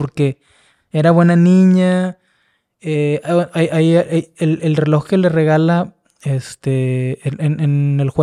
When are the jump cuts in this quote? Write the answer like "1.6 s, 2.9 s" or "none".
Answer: none